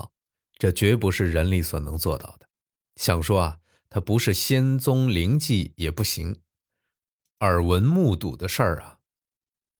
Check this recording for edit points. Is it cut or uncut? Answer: uncut